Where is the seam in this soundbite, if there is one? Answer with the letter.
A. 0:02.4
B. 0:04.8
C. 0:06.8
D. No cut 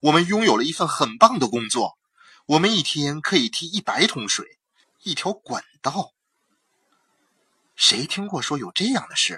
B